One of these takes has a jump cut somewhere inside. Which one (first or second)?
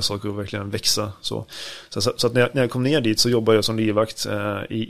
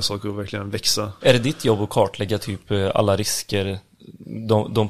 second